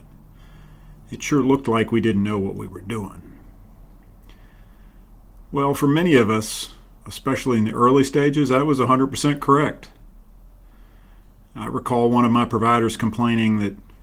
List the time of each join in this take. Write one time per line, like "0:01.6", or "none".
none